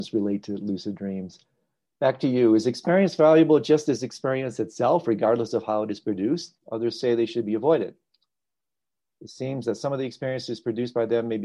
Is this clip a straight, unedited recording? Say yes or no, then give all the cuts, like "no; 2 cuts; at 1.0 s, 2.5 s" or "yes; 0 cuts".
no; 1 cut; at 6.6 s